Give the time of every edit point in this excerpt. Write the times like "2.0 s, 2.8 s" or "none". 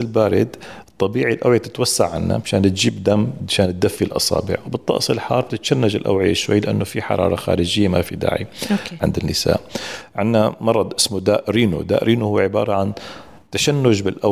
9.0 s